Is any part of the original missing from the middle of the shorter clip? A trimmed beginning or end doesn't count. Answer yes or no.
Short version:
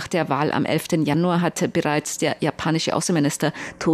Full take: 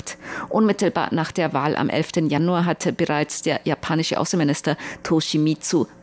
no